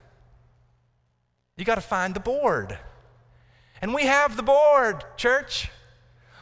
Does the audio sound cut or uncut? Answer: uncut